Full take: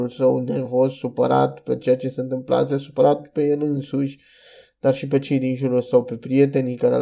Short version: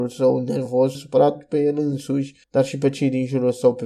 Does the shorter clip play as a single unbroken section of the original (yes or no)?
no